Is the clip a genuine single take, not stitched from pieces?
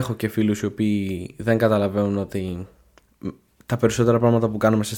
yes; 0 cuts

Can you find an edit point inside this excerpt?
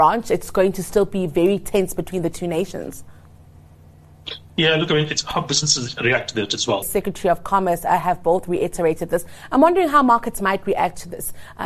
yes; 1 cut; at 6.8 s

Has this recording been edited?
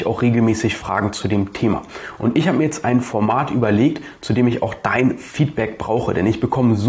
no; 0 cuts

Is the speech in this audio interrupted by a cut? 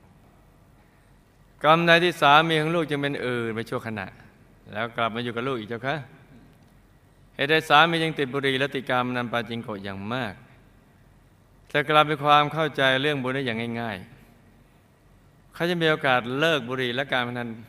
no; 0 cuts

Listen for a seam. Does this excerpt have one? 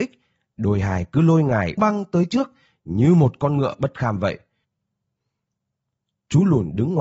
yes; 1 cut; at 1.8 s

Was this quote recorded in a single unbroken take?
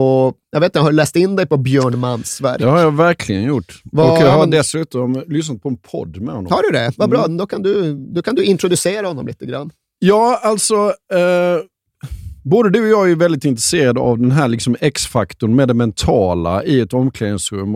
yes; 0 cuts

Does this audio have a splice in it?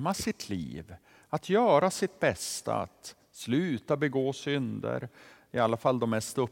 no; 0 cuts

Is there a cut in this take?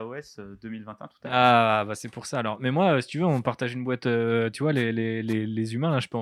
no; 0 cuts

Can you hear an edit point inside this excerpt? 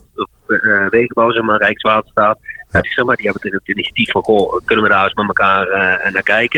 yes; 1 cut; at 2.8 s

